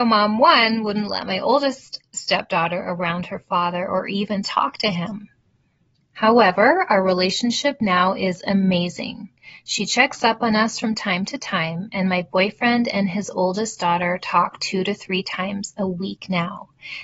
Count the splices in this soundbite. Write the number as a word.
zero